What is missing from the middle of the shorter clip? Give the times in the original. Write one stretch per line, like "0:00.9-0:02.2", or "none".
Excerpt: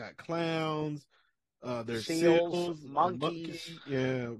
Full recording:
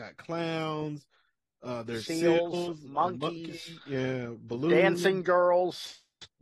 none